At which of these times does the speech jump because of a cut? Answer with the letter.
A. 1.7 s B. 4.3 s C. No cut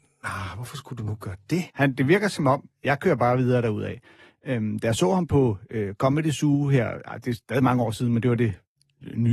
A